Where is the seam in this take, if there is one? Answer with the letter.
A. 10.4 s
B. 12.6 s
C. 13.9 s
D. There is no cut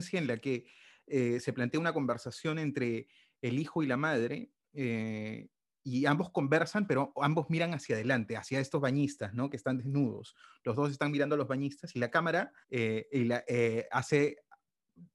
B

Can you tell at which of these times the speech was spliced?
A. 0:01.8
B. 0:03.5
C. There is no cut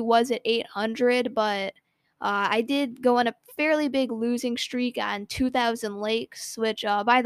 C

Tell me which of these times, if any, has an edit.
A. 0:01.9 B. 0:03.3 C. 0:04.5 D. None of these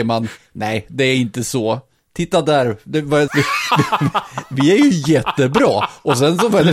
B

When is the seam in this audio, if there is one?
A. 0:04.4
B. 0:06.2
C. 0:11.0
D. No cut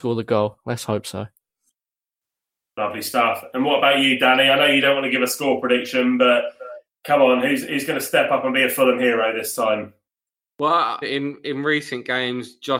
C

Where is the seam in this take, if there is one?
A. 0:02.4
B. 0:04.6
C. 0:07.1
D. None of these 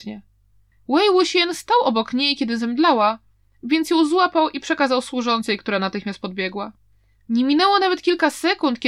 C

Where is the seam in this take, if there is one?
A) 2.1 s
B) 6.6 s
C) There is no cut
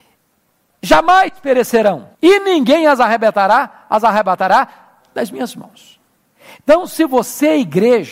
A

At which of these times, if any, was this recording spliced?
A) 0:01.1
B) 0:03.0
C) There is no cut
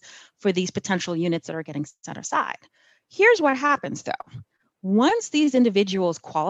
C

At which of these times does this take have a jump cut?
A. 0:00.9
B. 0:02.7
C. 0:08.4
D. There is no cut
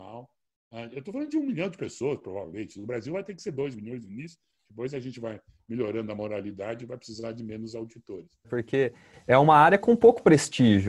C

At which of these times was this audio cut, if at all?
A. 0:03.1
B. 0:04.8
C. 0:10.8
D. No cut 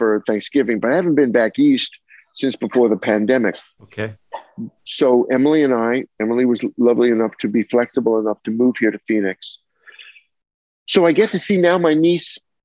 B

